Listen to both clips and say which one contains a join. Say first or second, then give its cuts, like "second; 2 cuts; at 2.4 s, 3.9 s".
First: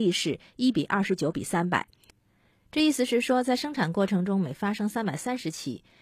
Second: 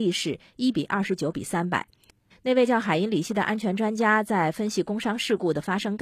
second; 1 cut; at 2.3 s